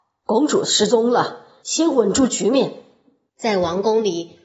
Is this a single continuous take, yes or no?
no